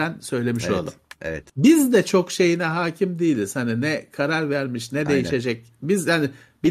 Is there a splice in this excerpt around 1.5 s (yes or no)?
yes